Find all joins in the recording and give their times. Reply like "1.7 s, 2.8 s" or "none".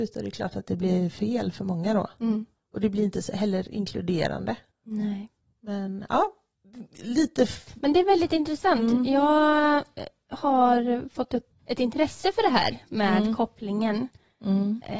none